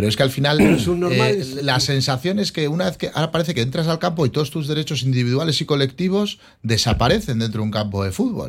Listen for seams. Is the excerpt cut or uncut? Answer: uncut